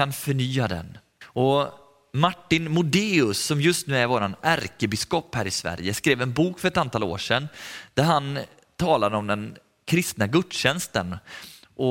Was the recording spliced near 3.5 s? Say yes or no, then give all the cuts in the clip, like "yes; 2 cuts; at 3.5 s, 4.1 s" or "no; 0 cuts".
no; 1 cut; at 1.2 s